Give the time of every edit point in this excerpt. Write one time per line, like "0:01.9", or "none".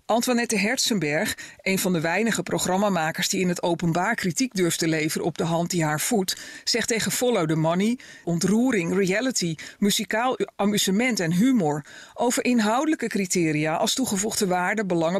0:08.2